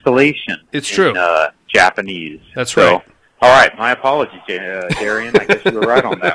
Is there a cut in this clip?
no; 0 cuts

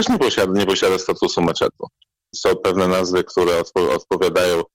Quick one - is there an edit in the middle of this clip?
yes; 1 cut; at 2.3 s

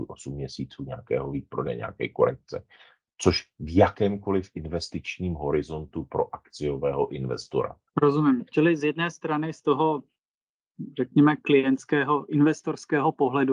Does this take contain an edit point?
yes; 1 cut; at 7.9 s

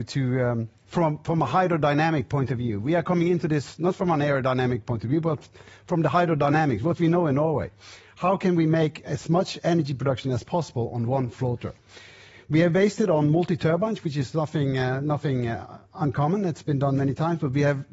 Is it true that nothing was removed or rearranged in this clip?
yes; 0 cuts

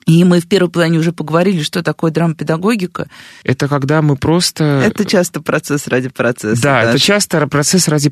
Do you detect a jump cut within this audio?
yes; 1 cut; at 3.4 s

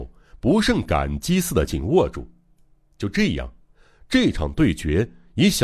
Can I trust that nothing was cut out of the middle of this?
no; 1 cut; at 1.7 s

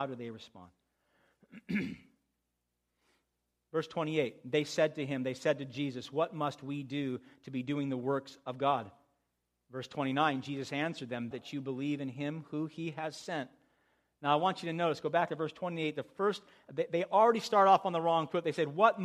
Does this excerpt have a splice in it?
yes; 1 cut; at 11.3 s

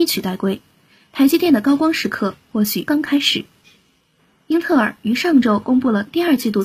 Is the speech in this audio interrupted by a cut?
yes; 1 cut; at 2.9 s

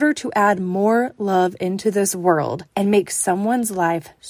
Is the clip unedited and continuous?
no; 1 cut; at 2.7 s

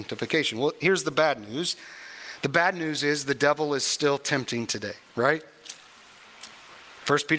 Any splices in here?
no; 0 cuts

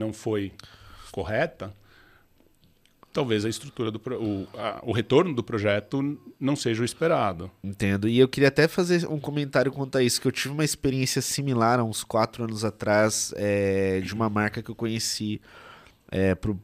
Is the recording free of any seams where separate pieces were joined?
yes; 0 cuts

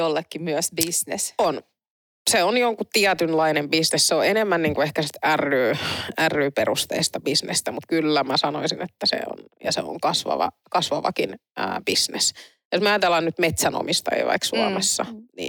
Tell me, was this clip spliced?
no; 0 cuts

